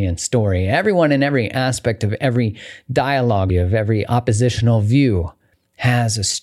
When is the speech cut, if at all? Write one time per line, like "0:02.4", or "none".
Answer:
0:03.5

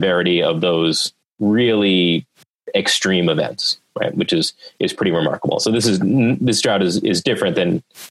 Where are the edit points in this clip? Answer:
none

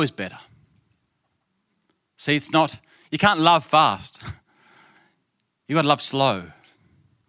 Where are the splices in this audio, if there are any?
none

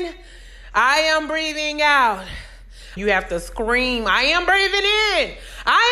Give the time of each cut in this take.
0:03.0

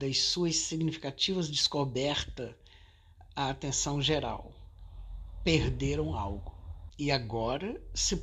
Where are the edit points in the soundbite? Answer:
0:06.9

